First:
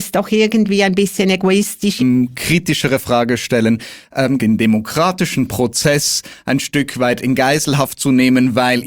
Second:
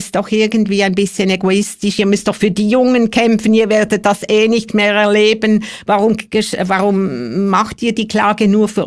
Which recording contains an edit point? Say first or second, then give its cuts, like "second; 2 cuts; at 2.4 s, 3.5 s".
first; 2 cuts; at 2.0 s, 4.4 s